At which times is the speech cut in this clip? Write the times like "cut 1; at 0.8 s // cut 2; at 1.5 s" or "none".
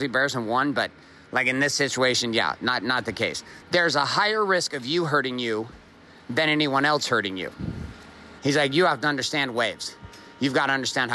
cut 1; at 3.6 s // cut 2; at 8.4 s